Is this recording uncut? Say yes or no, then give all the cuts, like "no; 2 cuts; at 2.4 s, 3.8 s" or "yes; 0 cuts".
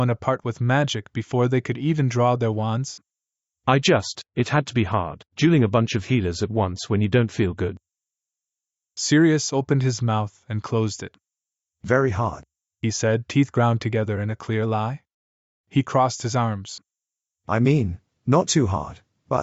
yes; 0 cuts